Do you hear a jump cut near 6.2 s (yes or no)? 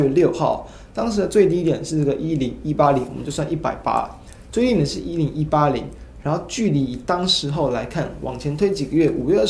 no